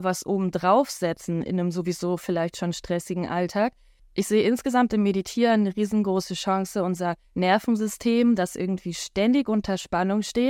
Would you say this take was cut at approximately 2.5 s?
no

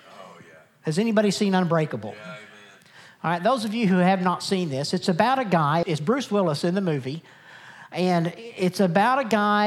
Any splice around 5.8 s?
yes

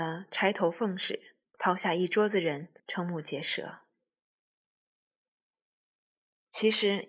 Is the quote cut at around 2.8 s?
yes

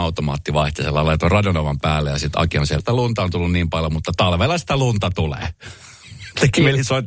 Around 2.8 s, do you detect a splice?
yes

